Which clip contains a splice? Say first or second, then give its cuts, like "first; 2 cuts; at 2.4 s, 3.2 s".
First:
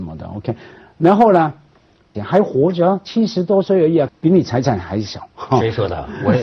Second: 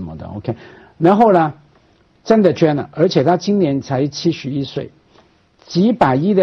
first; 2 cuts; at 2.1 s, 4.1 s